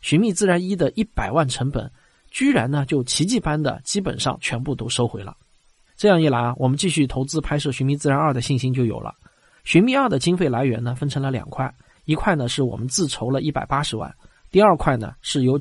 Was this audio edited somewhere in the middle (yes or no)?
no